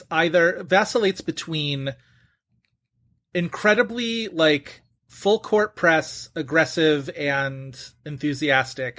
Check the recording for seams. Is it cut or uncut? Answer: uncut